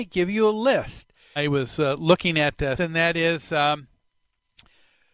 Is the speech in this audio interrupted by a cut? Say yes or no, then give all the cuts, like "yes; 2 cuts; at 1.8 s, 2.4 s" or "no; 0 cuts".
yes; 2 cuts; at 1.4 s, 2.8 s